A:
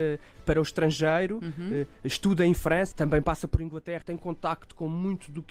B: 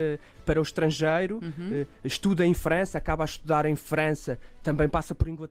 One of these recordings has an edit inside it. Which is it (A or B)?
A